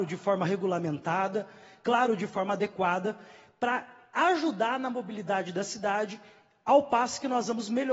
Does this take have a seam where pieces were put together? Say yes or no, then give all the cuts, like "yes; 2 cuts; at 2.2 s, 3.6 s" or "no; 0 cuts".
no; 0 cuts